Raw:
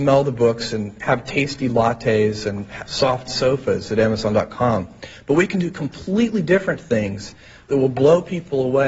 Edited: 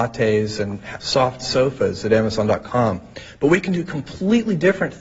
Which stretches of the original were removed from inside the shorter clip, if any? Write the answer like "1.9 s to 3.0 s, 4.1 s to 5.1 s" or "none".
none